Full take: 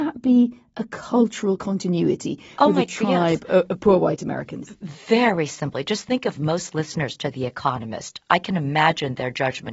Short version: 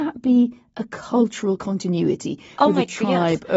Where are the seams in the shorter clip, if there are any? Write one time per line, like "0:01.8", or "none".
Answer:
none